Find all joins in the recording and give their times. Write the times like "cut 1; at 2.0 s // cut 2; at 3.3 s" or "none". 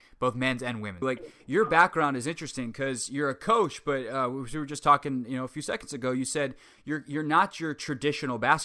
cut 1; at 1.0 s